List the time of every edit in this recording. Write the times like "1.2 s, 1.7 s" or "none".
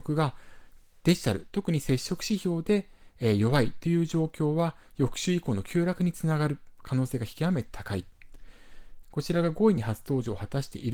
9.0 s